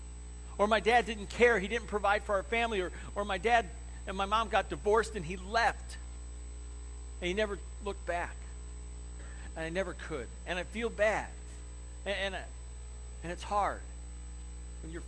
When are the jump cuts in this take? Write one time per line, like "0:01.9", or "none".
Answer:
0:09.5

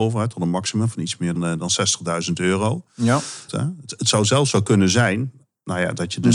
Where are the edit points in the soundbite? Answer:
0:01.4
0:03.5

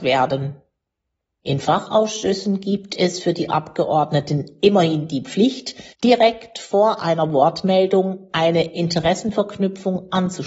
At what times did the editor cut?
0:05.9

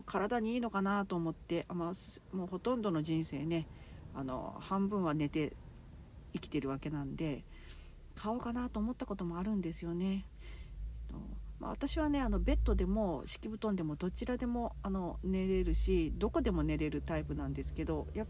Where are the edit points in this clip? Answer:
none

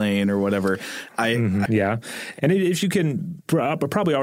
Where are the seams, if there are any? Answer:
0:01.7

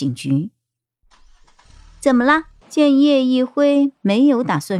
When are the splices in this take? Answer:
0:02.6

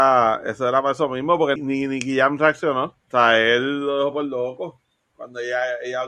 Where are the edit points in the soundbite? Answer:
0:01.6
0:03.0

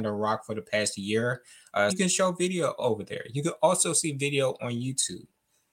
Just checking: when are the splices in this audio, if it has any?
0:01.9

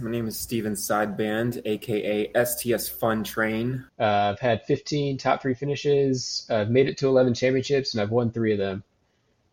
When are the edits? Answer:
0:03.9

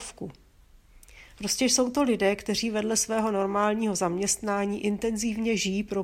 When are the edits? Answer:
0:01.3

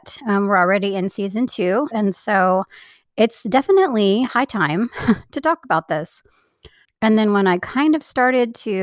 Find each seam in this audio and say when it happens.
0:01.9
0:06.8

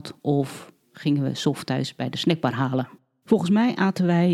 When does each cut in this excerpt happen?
0:03.2

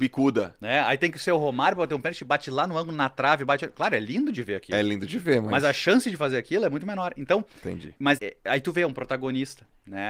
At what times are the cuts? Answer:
0:08.2

